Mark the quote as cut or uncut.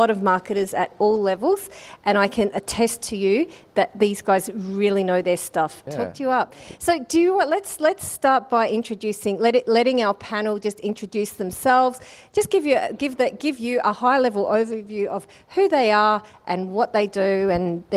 cut